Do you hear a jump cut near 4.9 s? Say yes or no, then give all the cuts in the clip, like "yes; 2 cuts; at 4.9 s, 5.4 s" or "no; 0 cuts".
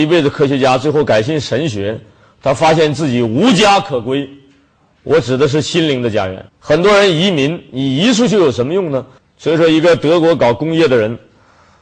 no; 2 cuts; at 6.5 s, 9.2 s